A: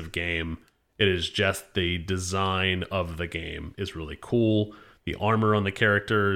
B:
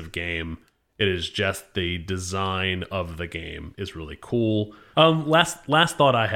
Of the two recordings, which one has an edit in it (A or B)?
B